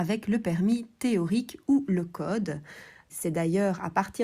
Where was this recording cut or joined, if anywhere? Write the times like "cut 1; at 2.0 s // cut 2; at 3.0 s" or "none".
cut 1; at 3.1 s